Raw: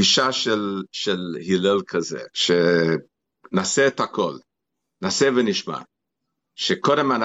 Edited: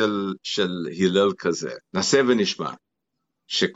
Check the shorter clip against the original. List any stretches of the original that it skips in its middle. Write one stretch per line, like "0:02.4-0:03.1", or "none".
0:02.3-0:04.9